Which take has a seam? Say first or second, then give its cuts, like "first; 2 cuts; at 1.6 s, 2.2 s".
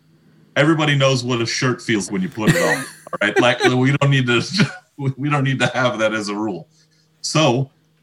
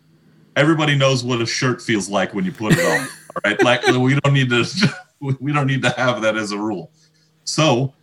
first; 1 cut; at 2.1 s